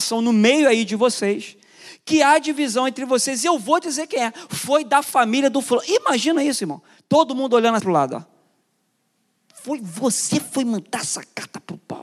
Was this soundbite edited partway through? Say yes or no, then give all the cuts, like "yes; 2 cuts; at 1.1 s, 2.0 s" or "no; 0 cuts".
yes; 1 cut; at 7.8 s